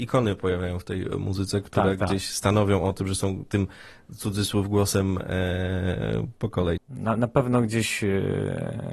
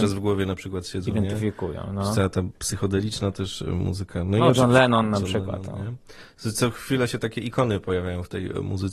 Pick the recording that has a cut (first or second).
first